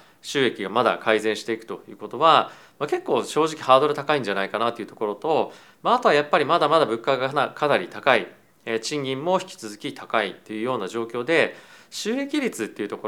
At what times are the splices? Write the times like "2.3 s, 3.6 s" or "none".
none